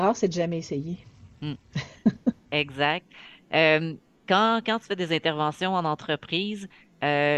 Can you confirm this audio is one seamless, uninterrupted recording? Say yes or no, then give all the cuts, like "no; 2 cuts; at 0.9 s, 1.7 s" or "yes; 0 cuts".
yes; 0 cuts